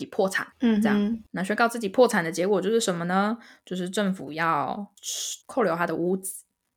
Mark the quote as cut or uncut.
cut